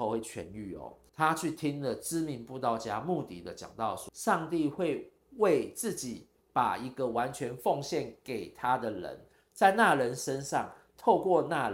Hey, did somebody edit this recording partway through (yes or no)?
yes